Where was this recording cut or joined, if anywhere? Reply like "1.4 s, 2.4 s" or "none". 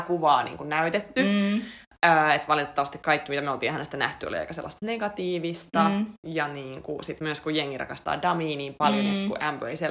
none